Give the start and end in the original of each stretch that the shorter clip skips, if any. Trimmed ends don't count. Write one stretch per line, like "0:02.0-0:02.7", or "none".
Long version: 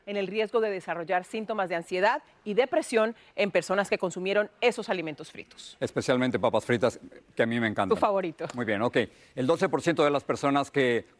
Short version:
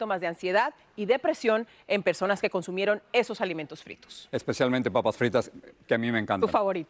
none